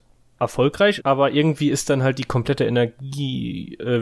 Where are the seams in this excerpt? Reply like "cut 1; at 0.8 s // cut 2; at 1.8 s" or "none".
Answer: cut 1; at 1.0 s

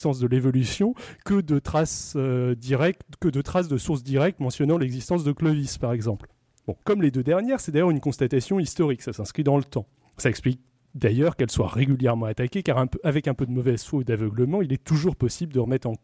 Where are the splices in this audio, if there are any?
cut 1; at 6.8 s

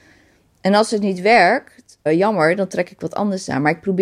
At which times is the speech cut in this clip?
cut 1; at 2.1 s

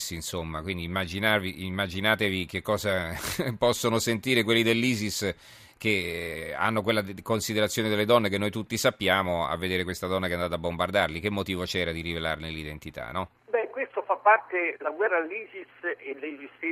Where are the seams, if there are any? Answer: cut 1; at 13.4 s

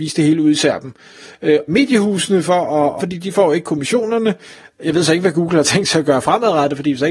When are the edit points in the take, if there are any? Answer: cut 1; at 1.7 s // cut 2; at 3.0 s

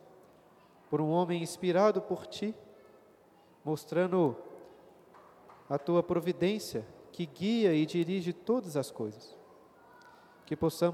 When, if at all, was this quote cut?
none

